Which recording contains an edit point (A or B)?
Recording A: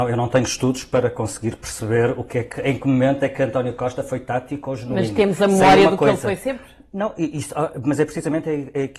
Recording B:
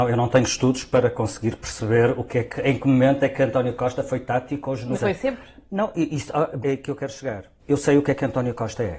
B